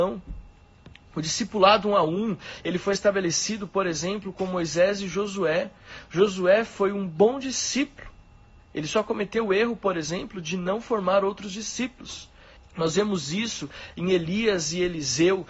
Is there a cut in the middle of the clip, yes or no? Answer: yes